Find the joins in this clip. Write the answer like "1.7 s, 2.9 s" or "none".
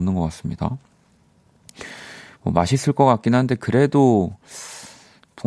none